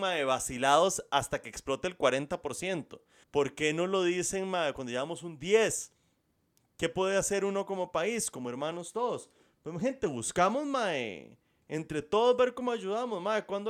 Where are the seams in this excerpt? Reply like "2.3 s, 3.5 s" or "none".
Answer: 3.2 s